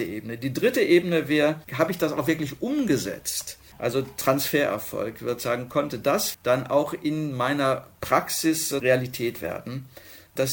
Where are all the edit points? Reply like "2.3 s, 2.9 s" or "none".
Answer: 1.6 s, 3.7 s, 6.3 s